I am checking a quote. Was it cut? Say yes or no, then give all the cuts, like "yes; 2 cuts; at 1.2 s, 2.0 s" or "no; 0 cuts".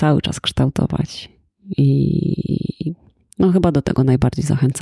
no; 0 cuts